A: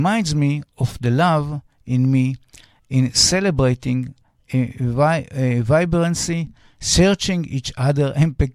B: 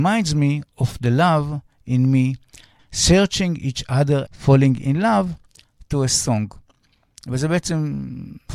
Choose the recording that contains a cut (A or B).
B